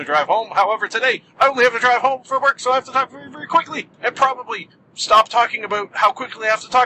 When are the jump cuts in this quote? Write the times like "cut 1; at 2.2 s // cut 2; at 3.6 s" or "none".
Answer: cut 1; at 3.9 s